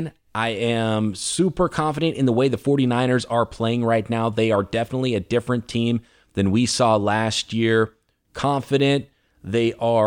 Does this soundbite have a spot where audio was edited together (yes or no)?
no